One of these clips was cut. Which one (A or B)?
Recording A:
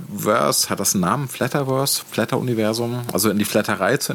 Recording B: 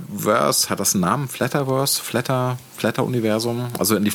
A